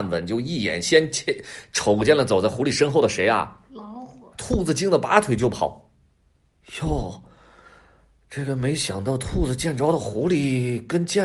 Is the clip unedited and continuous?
no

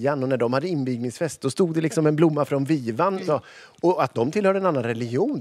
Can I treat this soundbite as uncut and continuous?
no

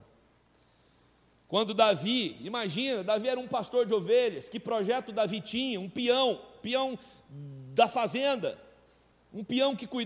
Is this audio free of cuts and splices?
yes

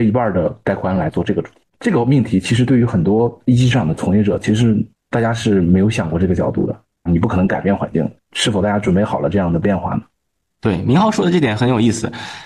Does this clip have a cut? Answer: yes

